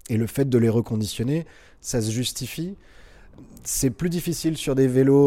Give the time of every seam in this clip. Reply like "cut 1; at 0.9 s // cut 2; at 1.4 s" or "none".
none